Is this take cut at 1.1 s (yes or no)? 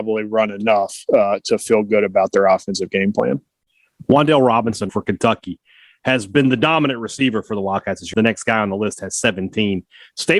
no